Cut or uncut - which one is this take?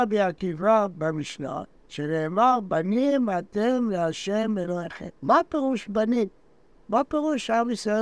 cut